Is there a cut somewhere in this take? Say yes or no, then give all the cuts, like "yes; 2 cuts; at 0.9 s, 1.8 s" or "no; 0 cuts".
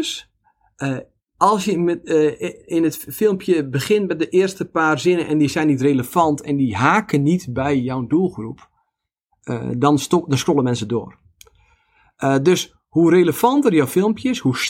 no; 0 cuts